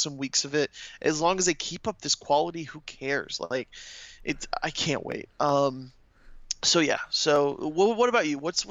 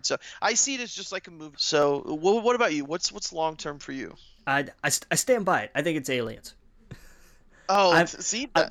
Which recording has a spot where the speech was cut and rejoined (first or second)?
second